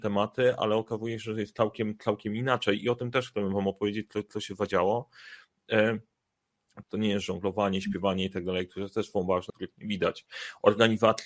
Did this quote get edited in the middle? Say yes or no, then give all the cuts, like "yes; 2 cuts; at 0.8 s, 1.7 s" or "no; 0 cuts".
yes; 2 cuts; at 6.8 s, 9.5 s